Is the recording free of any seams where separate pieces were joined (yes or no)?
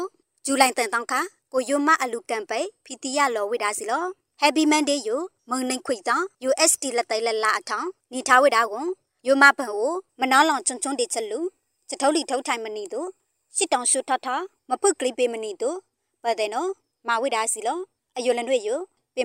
yes